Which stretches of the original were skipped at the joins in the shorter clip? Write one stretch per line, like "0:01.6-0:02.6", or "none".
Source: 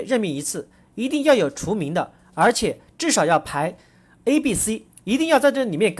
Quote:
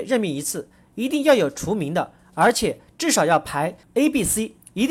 0:03.8-0:04.1